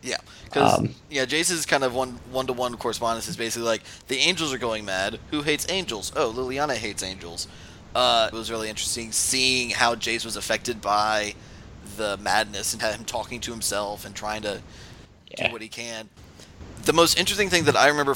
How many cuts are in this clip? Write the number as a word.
two